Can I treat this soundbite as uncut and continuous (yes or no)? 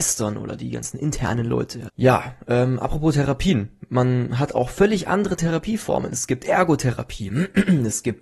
no